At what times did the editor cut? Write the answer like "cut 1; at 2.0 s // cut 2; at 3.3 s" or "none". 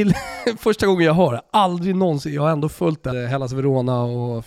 cut 1; at 3.1 s